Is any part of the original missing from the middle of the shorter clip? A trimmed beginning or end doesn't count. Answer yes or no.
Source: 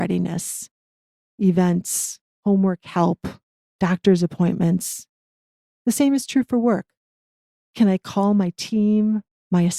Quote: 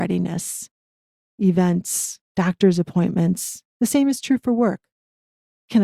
yes